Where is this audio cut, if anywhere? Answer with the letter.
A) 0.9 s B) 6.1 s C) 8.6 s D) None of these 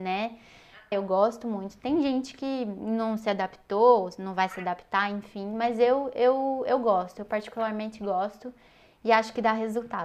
A